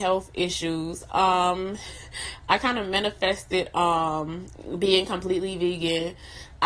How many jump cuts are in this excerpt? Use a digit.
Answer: 0